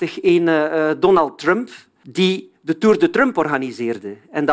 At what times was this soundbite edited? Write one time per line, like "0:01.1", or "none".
none